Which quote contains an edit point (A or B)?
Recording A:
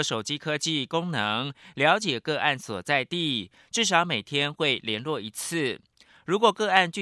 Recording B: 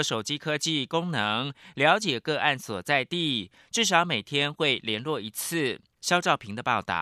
B